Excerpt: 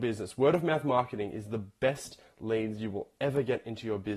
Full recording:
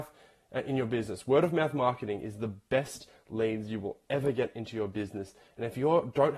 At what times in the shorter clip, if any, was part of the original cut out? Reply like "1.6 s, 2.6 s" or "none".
none

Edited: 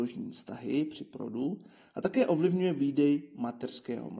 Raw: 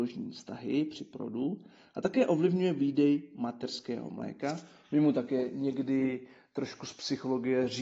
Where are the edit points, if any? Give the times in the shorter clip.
none

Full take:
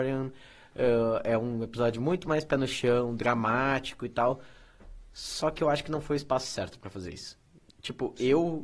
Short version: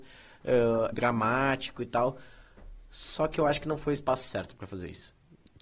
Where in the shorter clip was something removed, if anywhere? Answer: 0.9 s

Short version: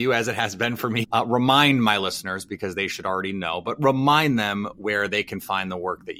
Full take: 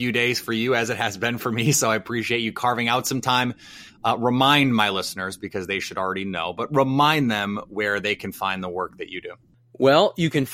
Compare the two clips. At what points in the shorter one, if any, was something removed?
1.0 s

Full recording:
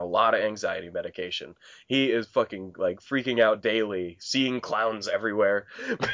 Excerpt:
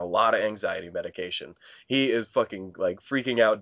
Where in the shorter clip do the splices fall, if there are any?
none

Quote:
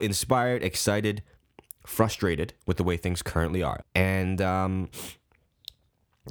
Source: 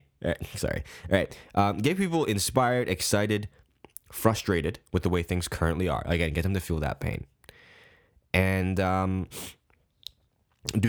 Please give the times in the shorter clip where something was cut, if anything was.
3.8 s

